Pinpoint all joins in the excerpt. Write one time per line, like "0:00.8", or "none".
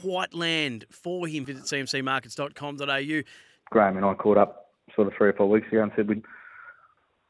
0:01.4
0:03.6